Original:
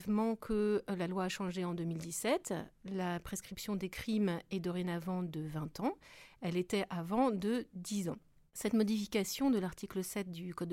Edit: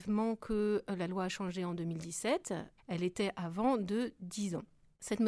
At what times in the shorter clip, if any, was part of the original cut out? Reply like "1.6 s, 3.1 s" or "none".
2.8 s